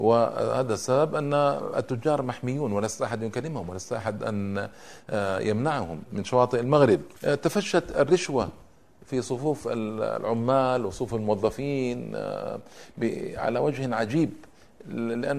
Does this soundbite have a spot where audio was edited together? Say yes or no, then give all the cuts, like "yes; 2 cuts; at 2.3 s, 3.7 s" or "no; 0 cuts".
yes; 1 cut; at 7.2 s